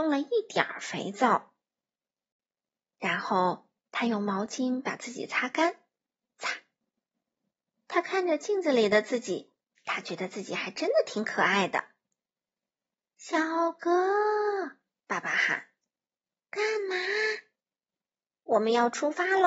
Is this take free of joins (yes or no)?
no